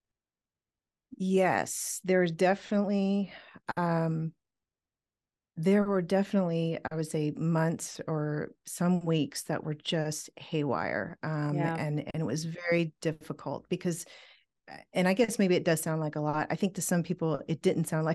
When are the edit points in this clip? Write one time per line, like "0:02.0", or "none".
none

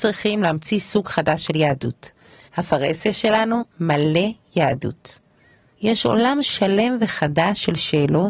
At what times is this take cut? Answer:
0:02.5
0:03.7
0:05.7

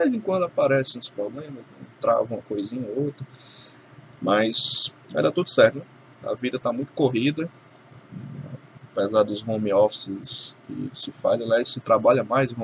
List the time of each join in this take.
0:05.7

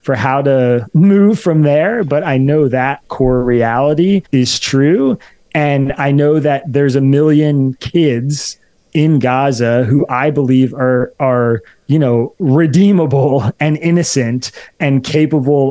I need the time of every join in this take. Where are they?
0:04.3

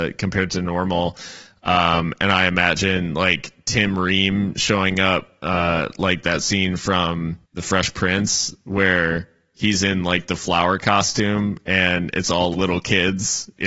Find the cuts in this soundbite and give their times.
0:07.4
0:12.5

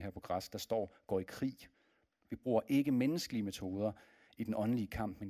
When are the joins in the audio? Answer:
0:02.2

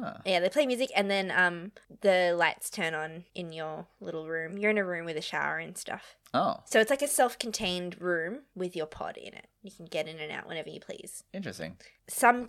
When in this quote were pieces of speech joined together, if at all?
none

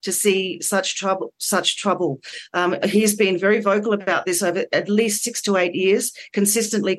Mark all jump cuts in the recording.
none

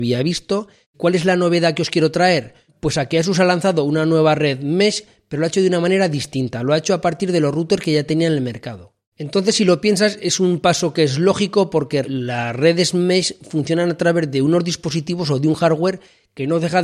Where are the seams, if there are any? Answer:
0:00.9
0:09.1
0:12.0

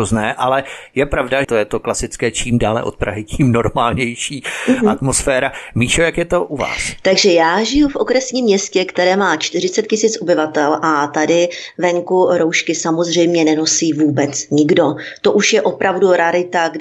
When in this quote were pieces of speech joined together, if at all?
0:01.4

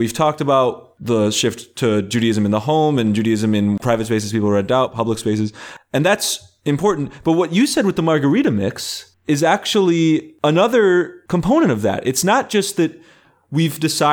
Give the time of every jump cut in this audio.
none

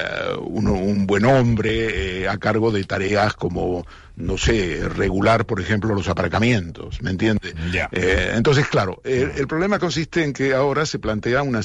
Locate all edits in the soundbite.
none

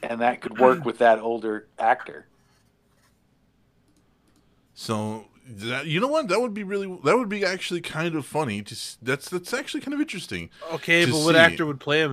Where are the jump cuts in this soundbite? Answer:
none

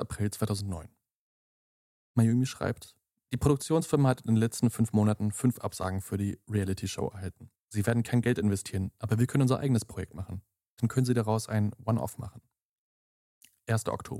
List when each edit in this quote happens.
0:07.6

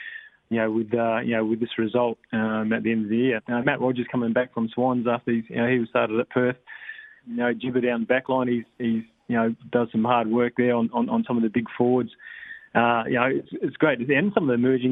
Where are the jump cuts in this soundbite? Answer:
0:03.4
0:07.2
0:13.5

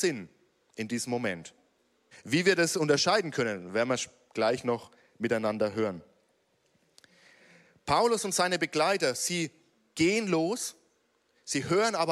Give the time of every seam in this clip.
0:02.1

